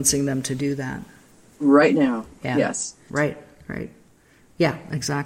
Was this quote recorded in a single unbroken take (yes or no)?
no